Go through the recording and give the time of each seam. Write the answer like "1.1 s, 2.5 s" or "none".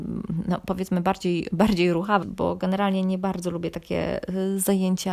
2.2 s

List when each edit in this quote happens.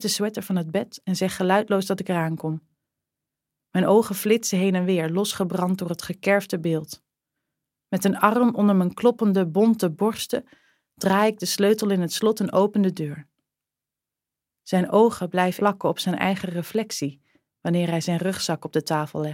15.6 s

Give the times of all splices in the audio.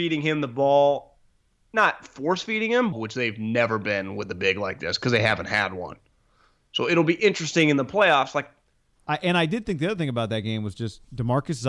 2.9 s, 9.0 s

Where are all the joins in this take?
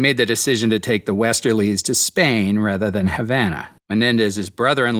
3.8 s

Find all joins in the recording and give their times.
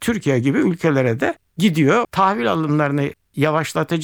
2.0 s

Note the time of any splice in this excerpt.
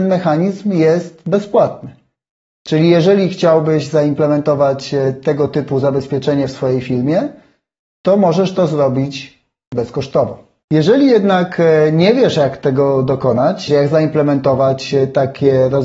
13.7 s

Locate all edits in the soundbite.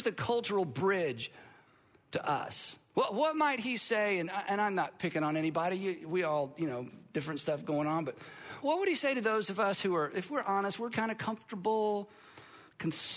8.6 s, 10.9 s

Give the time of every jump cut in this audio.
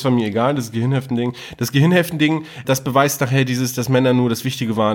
2.6 s

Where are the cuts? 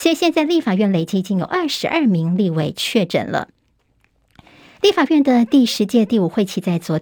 4.6 s

